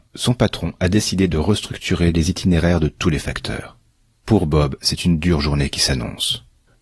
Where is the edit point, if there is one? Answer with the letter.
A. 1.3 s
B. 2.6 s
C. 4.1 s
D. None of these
D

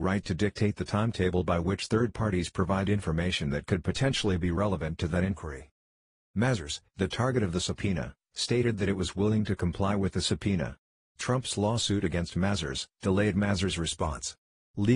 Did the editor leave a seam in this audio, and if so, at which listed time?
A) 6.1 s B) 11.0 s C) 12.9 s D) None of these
C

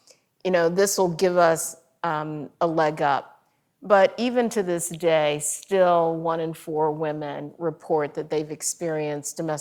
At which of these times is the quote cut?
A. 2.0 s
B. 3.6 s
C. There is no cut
C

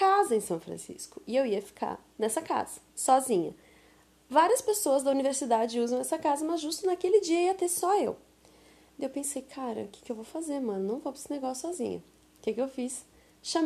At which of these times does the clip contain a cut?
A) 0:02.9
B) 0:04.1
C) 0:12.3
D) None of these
A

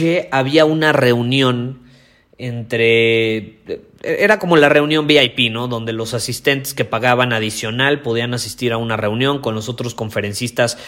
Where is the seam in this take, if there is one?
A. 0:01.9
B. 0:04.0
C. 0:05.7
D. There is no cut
D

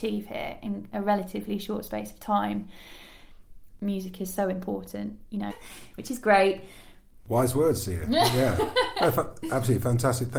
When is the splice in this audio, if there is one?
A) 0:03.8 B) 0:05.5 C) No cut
B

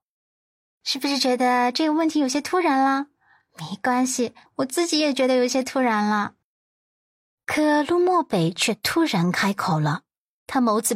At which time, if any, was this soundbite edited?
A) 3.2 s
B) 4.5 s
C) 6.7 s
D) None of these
B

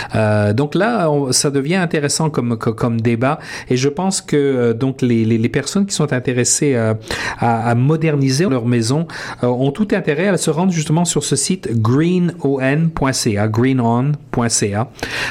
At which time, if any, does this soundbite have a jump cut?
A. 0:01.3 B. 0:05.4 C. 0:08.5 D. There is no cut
C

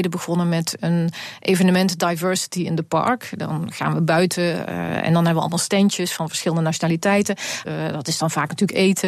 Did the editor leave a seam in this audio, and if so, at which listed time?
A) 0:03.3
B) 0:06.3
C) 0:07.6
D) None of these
C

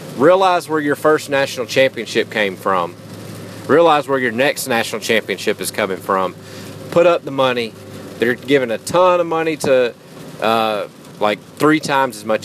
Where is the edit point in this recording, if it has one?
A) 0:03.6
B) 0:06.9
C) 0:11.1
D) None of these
C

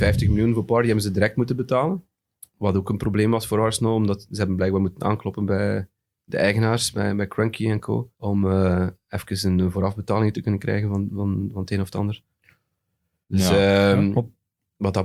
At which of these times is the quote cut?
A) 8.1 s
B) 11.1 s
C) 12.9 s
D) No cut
A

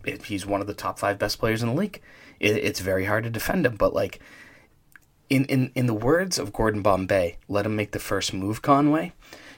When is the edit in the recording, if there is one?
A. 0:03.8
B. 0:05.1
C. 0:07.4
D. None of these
D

